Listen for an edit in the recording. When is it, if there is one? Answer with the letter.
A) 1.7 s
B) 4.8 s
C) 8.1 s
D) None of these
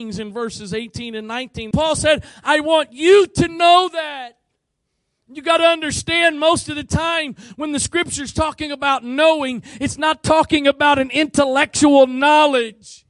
A